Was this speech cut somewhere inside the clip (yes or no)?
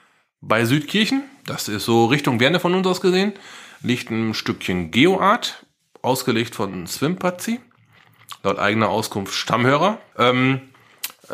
yes